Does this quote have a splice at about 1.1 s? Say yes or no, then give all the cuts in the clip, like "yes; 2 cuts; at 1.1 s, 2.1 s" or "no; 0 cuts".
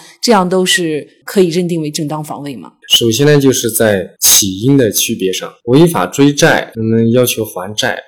no; 2 cuts; at 2.8 s, 6.7 s